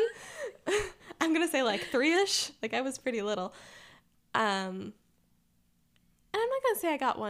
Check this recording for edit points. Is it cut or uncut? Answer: uncut